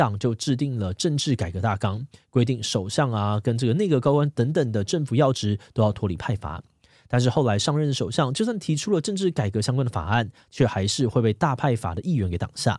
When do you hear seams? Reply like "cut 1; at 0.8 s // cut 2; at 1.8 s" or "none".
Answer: none